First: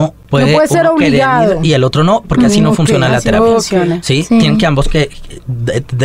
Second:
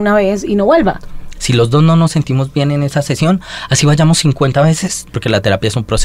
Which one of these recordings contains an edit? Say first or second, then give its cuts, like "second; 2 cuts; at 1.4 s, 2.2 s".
second; 2 cuts; at 1.4 s, 5.1 s